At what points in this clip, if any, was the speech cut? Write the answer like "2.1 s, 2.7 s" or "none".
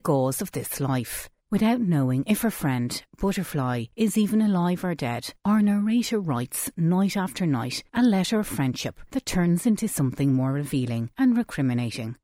1.4 s

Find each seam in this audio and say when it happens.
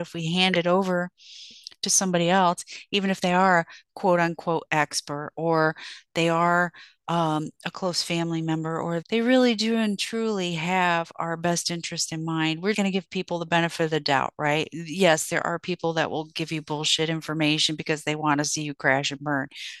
9.0 s, 12.7 s

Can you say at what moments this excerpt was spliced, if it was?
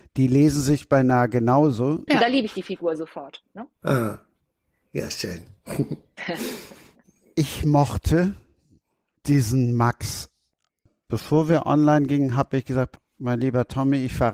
2.1 s

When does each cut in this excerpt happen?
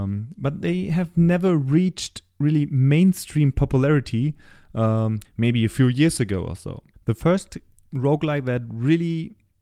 5.2 s

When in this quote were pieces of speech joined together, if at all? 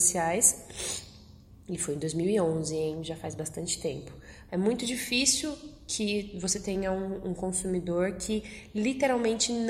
4.5 s

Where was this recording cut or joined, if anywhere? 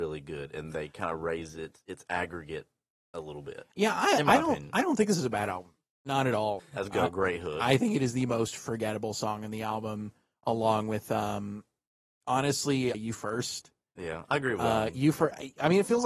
6.6 s, 12.9 s

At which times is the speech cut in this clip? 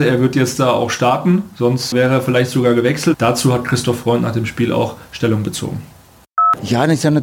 1.9 s, 3.1 s

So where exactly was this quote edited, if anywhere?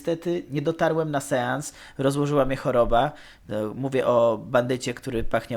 none

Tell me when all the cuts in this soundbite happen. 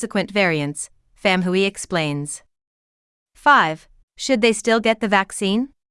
4.0 s

